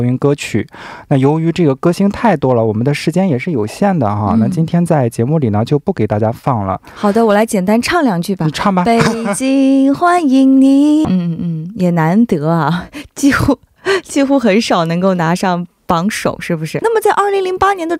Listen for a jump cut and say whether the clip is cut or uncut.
cut